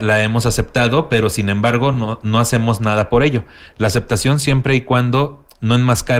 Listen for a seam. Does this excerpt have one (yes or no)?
no